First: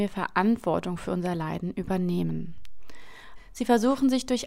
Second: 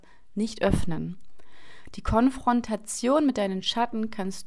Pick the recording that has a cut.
first; 1 cut; at 3.4 s

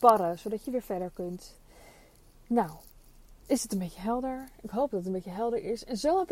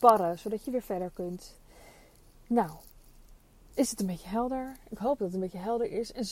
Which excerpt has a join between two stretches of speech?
first; 1 cut; at 3.4 s

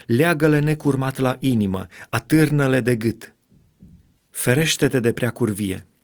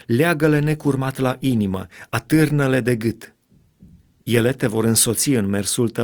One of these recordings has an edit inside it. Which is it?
first; 1 cut; at 4.2 s

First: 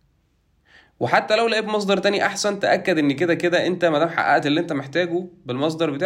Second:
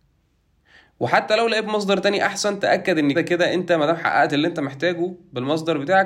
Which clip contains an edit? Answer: second; 1 cut; at 3.1 s

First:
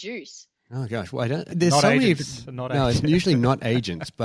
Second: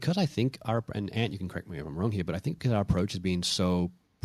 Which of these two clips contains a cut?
first; 1 cut; at 1.5 s

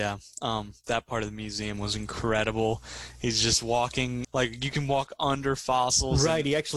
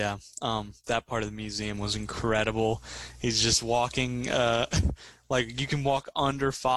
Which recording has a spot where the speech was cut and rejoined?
first; 1 cut; at 4.2 s

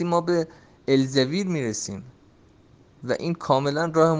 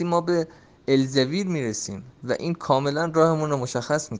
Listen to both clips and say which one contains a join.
second; 1 cut; at 2.1 s

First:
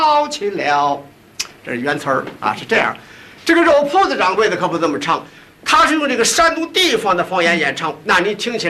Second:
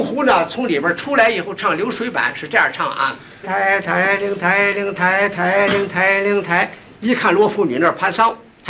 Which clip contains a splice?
second; 1 cut; at 3.4 s

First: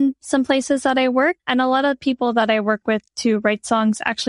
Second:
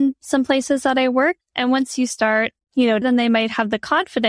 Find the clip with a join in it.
second; 2 cuts; at 1.4 s, 3.0 s

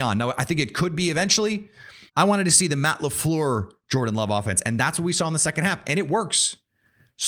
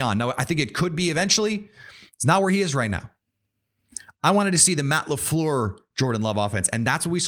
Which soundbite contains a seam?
first; 1 cut; at 2.1 s

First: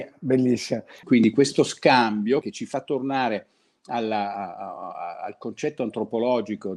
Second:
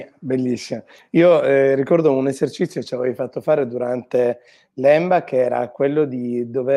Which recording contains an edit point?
first; 2 cuts; at 1.0 s, 2.4 s

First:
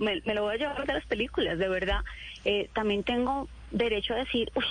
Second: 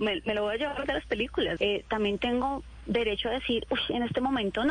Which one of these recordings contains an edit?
second; 1 cut; at 1.6 s

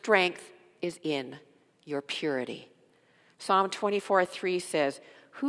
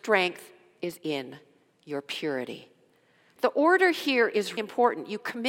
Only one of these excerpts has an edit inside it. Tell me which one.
second; 2 cuts; at 3.4 s, 4.6 s

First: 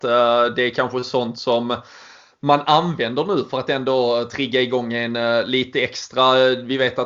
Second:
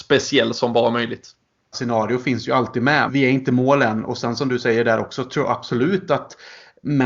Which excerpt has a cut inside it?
second; 2 cuts; at 1.7 s, 3.1 s

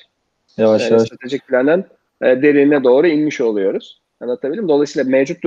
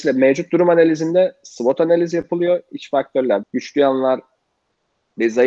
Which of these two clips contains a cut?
second; 1 cut; at 3.4 s

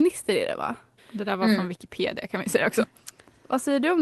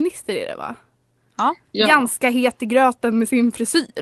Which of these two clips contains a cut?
first; 2 cuts; at 1.0 s, 2.8 s

